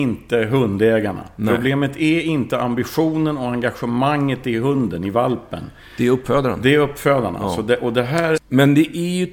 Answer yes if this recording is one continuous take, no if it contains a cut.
no